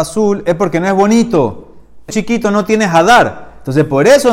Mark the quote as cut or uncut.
cut